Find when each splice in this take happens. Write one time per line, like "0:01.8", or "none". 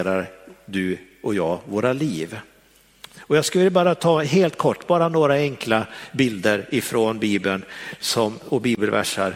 none